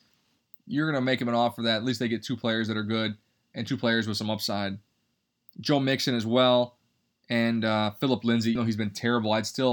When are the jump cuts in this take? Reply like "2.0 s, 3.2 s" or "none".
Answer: 8.6 s